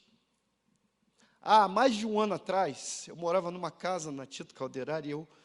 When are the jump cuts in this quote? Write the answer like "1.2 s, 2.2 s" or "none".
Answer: none